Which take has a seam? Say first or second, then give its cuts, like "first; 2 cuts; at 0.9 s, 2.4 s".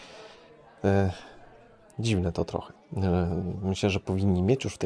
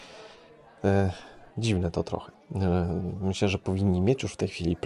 second; 1 cut; at 1.5 s